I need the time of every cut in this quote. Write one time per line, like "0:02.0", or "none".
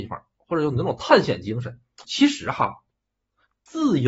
0:02.0